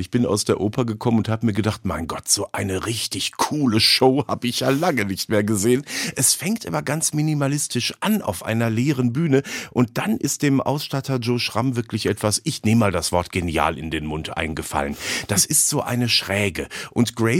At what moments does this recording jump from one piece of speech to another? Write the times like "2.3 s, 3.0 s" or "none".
none